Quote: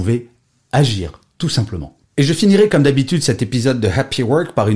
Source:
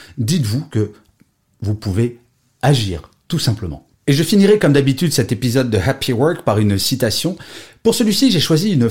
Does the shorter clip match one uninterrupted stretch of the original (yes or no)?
yes